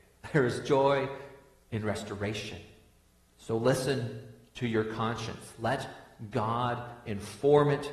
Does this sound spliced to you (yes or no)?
yes